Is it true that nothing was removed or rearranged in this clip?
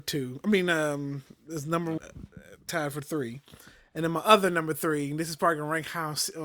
no; 1 cut; at 2.0 s

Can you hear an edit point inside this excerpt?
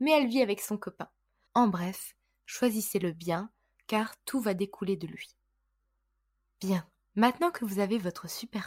yes; 1 cut; at 1.5 s

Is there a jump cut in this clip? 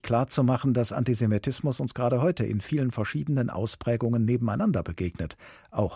no; 0 cuts

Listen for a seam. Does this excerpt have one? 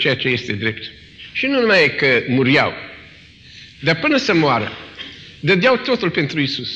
no; 0 cuts

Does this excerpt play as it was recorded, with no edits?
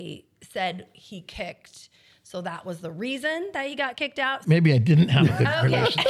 no; 1 cut; at 4.4 s

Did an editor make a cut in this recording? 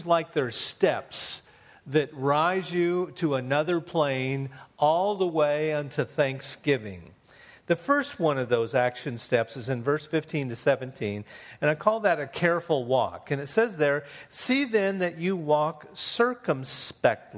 no; 0 cuts

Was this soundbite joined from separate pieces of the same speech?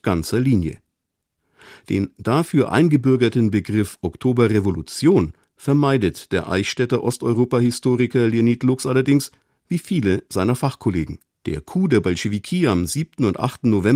yes; 1 cut; at 11.4 s

